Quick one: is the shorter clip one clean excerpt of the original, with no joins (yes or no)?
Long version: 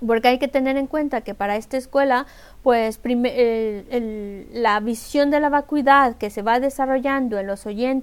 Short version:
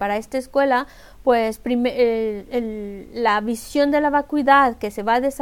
yes